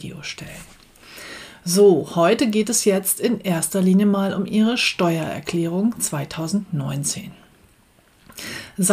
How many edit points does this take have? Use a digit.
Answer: 0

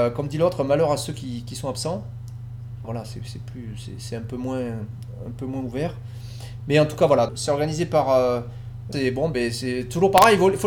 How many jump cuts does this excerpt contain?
3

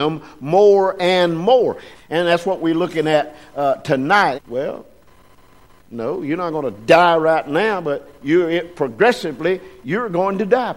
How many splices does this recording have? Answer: 2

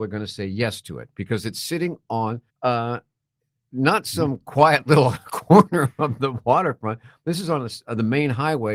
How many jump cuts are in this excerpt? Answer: 1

